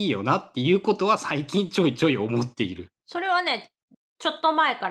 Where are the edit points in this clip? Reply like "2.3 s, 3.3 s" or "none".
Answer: 3.0 s

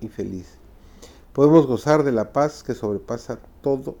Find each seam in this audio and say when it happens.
1.2 s

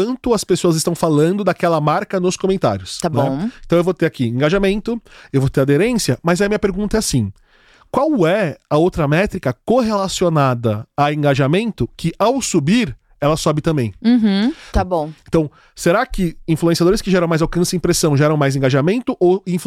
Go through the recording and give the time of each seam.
14.7 s

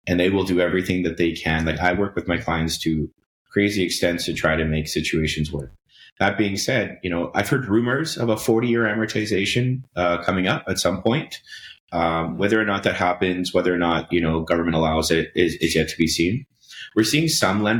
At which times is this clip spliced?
none

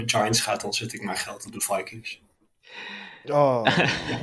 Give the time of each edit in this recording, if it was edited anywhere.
none

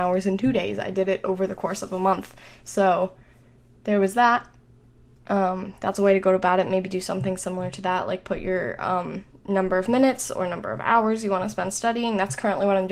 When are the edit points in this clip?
none

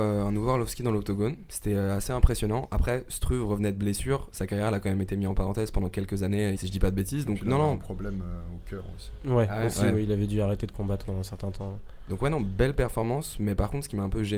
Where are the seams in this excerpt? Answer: 6.6 s

